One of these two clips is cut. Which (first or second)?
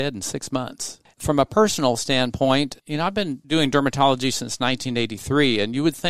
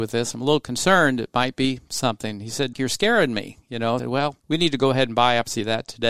second